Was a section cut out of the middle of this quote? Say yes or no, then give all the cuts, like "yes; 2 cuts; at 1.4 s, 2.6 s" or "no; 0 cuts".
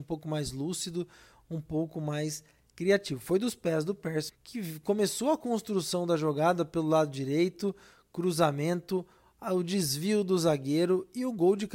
yes; 1 cut; at 4.3 s